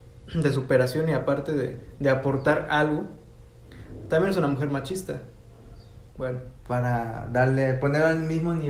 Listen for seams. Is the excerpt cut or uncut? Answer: cut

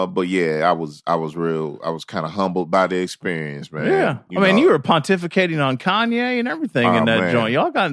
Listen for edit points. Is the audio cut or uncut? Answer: uncut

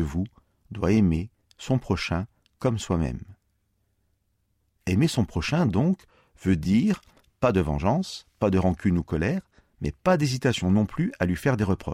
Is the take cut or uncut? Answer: uncut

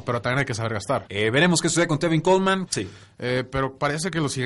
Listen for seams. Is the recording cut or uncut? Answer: cut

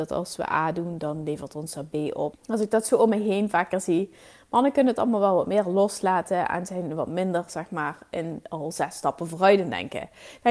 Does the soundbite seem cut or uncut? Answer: cut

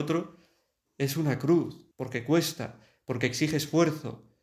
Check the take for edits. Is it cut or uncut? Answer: cut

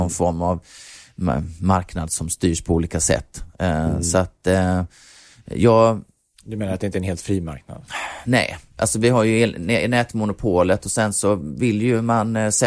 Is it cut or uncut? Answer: uncut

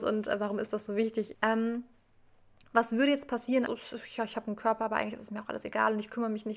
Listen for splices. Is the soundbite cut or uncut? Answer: cut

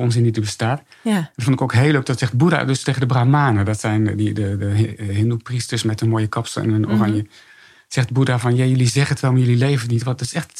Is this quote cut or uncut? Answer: uncut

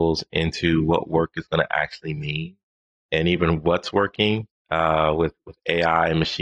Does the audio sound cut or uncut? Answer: cut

